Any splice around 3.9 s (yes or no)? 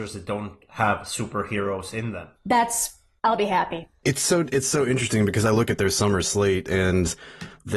no